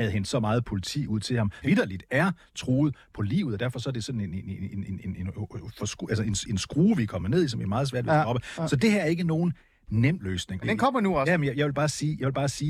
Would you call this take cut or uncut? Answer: cut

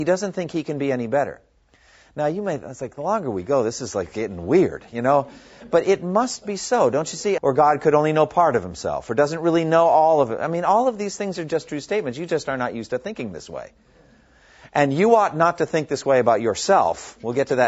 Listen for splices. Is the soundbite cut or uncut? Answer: cut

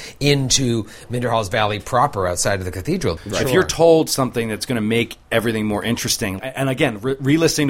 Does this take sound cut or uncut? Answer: cut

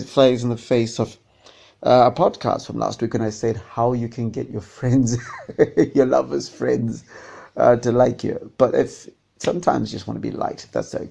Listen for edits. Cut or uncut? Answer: uncut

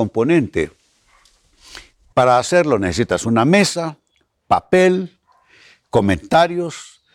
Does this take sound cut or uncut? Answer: cut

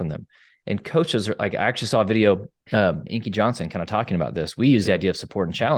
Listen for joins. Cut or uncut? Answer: cut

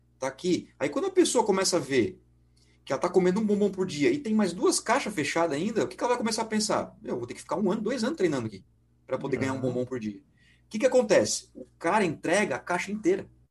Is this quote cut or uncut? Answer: uncut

